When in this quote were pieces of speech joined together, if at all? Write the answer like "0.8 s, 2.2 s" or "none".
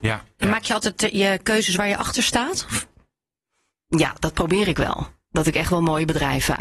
none